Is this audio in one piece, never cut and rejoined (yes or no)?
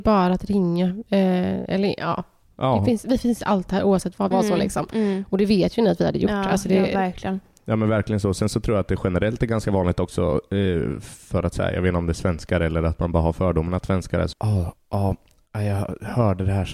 no